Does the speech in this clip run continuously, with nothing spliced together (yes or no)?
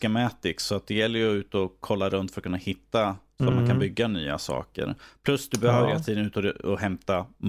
yes